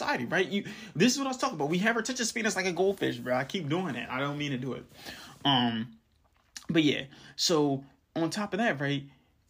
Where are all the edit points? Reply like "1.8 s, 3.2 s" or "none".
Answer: none